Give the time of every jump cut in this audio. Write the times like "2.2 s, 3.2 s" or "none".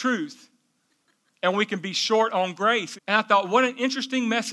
3.0 s